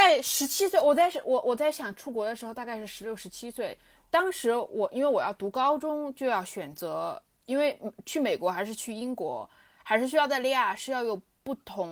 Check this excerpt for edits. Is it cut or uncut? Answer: uncut